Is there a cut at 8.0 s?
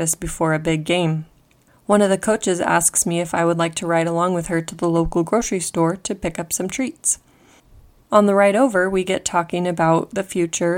yes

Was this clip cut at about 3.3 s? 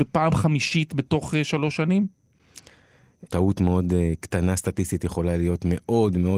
yes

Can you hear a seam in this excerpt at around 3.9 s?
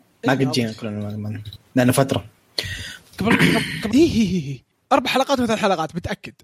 yes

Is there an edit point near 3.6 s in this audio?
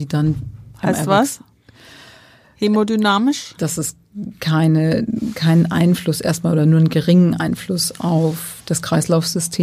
yes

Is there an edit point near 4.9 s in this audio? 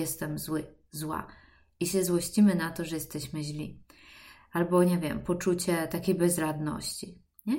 no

